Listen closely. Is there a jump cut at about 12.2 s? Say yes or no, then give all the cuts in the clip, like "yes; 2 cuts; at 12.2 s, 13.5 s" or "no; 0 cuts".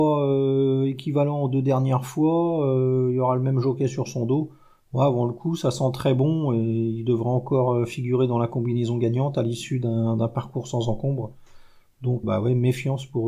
yes; 1 cut; at 12.2 s